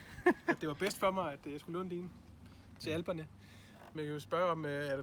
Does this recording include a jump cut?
yes; 1 cut; at 3.9 s

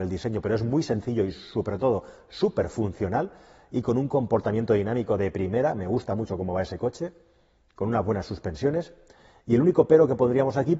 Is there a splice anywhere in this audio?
no; 0 cuts

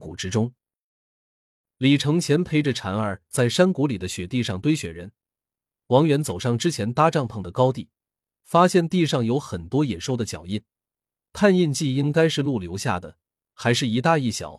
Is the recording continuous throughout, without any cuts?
yes; 0 cuts

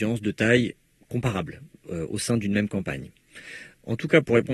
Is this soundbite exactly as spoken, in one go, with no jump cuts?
yes; 0 cuts

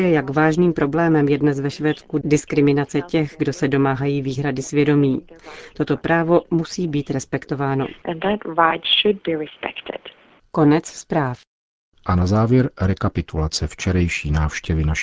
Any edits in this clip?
yes; 1 cut; at 10.4 s

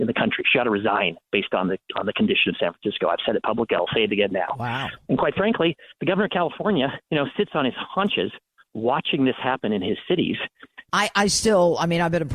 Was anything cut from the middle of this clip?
yes; 2 cuts; at 7.0 s, 10.9 s

